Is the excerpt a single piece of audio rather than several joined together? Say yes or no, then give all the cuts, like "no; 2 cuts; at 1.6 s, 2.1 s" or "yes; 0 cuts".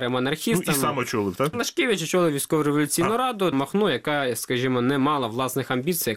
no; 2 cuts; at 1.5 s, 3.5 s